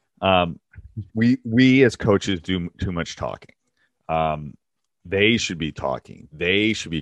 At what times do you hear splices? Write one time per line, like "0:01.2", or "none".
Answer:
0:01.1